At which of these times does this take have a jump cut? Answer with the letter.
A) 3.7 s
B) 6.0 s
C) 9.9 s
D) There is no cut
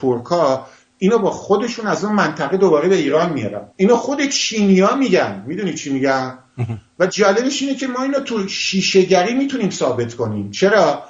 A